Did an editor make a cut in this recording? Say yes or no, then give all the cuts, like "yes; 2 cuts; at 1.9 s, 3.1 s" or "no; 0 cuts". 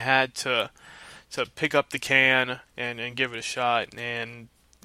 yes; 2 cuts; at 2.7 s, 3.9 s